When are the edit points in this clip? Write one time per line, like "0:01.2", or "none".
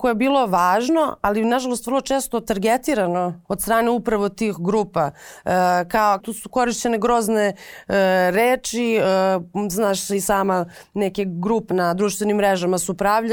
0:03.4
0:06.2
0:11.7